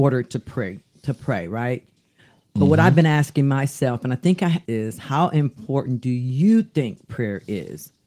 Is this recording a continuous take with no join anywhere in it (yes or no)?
no